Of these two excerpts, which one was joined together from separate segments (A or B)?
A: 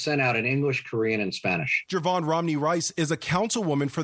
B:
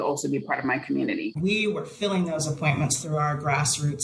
B